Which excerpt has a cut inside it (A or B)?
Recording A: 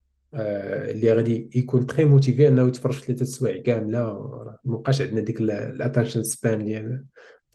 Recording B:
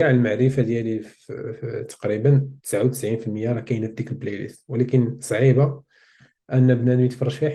B